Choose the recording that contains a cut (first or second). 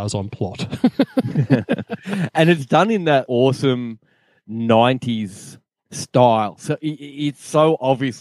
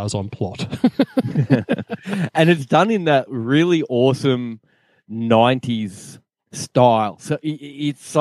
first